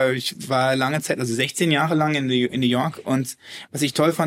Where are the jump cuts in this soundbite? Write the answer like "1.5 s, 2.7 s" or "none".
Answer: none